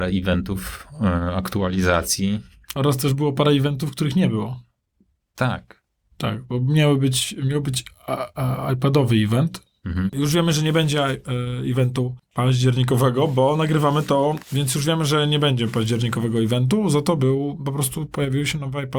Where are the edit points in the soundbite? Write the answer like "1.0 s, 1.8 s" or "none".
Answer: 10.1 s, 14.4 s

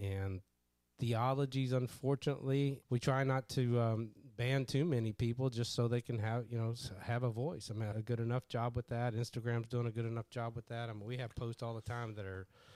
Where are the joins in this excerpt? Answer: 2.8 s, 7.9 s

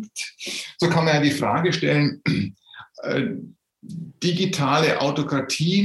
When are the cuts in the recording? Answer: none

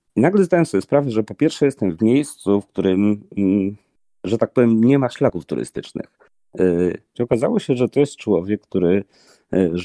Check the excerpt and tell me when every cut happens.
7.1 s

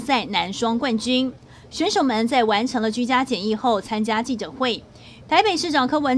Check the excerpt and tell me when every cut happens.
5.2 s

